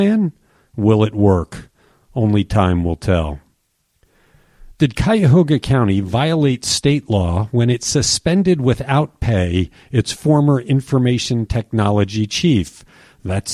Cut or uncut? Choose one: uncut